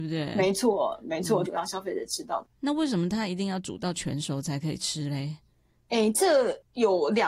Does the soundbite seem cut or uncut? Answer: cut